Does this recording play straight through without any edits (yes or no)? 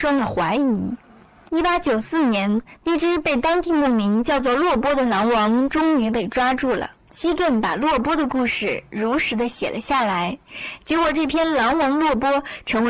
no